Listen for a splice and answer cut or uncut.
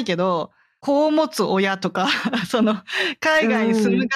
uncut